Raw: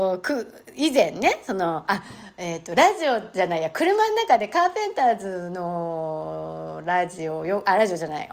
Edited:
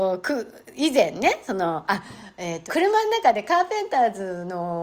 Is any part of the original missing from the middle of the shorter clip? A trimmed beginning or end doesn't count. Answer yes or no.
yes